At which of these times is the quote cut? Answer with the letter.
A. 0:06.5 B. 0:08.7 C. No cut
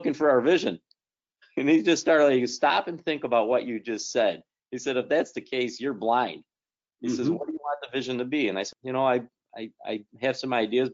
B